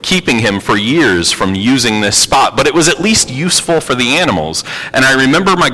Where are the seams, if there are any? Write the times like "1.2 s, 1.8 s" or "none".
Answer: none